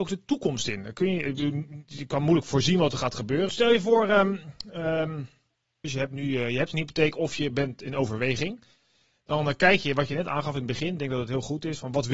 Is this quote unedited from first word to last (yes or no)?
no